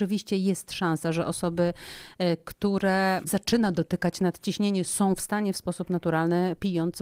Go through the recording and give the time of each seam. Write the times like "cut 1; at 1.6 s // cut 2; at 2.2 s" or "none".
none